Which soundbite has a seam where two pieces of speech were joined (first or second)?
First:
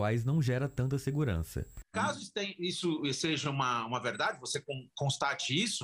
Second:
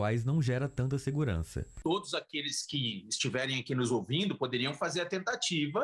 first